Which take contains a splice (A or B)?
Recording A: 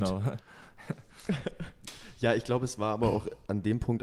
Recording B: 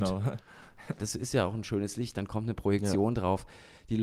B